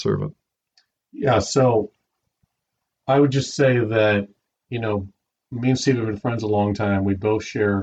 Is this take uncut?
yes; 0 cuts

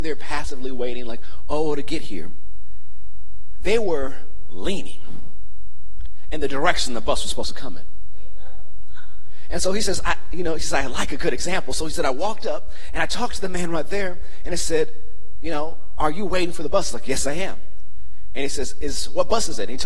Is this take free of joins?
yes; 0 cuts

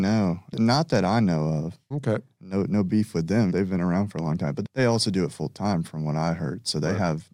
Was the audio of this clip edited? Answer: yes; 1 cut; at 1.9 s

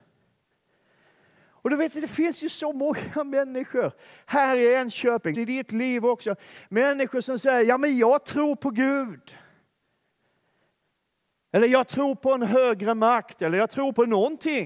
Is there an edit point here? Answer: yes; 1 cut; at 5.3 s

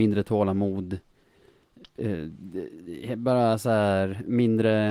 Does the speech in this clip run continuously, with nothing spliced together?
yes; 0 cuts

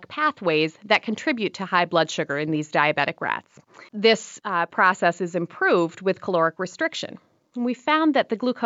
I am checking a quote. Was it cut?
yes; 1 cut; at 3.9 s

